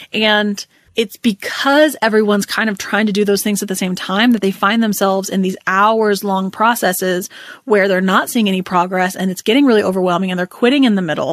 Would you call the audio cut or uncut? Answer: uncut